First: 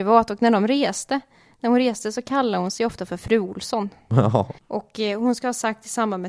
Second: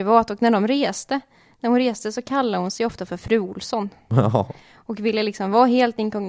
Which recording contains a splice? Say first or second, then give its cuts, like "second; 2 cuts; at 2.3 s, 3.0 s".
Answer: first; 1 cut; at 4.6 s